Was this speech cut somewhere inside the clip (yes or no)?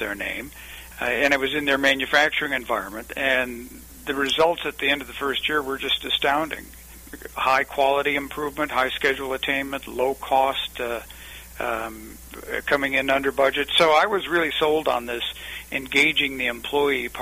no